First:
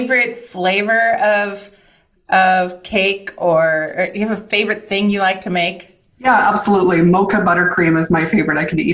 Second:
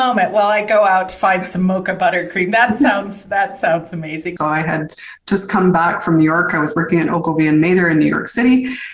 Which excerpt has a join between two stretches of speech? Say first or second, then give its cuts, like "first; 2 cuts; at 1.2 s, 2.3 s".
second; 1 cut; at 4.4 s